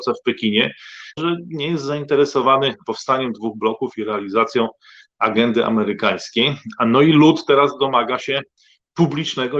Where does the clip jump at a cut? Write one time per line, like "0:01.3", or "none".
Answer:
0:01.2